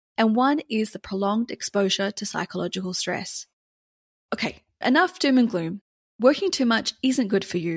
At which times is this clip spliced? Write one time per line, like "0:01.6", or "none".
0:04.8